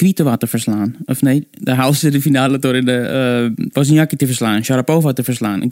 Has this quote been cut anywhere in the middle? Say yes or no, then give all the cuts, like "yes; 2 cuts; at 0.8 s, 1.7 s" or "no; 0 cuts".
no; 0 cuts